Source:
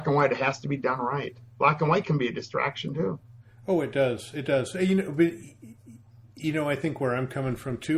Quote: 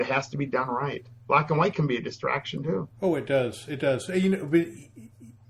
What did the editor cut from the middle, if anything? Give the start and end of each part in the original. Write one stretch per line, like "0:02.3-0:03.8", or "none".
0:03.3-0:03.6